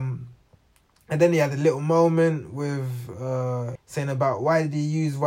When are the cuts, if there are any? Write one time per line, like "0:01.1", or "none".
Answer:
0:03.8